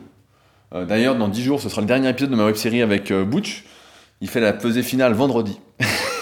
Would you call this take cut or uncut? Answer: uncut